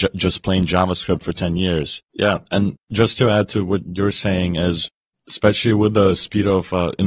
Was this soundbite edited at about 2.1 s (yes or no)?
yes